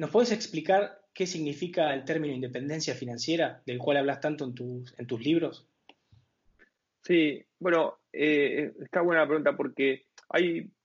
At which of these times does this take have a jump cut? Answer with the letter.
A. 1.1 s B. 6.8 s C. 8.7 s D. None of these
D